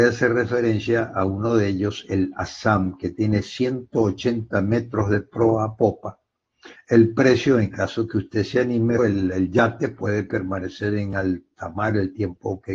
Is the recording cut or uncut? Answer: cut